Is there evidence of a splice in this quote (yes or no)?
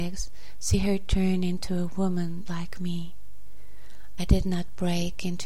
yes